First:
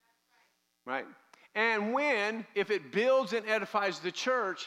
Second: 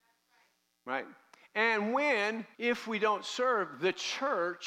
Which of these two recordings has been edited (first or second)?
second